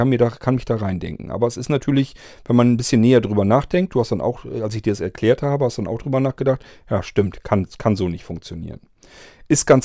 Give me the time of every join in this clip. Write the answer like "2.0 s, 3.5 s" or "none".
none